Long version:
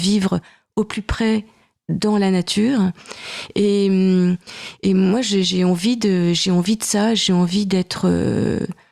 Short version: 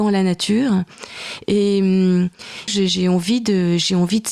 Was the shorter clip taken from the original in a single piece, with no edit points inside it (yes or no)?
no